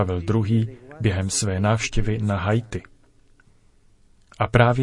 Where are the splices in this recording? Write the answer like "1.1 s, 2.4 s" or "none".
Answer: none